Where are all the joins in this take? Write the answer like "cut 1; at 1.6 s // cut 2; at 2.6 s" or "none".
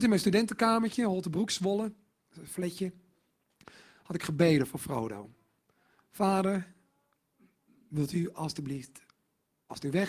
none

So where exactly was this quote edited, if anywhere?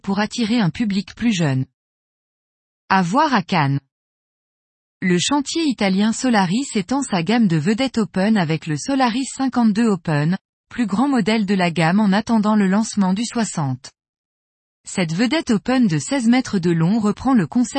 none

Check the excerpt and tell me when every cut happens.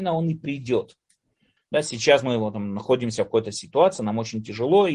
cut 1; at 1.6 s

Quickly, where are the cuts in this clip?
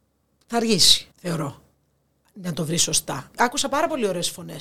cut 1; at 1.1 s // cut 2; at 3.3 s

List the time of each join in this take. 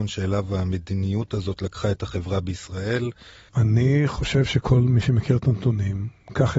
cut 1; at 3.5 s

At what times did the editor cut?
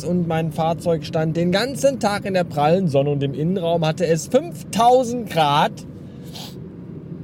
none

